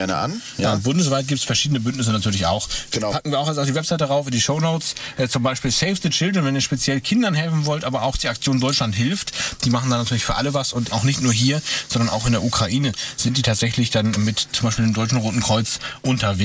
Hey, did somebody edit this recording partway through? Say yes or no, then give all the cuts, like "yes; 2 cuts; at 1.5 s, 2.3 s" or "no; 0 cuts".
yes; 2 cuts; at 10.9 s, 14.2 s